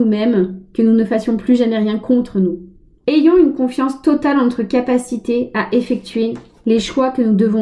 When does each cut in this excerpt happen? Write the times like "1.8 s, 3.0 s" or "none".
3.0 s